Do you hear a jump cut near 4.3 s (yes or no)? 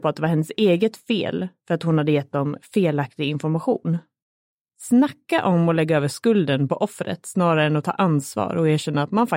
no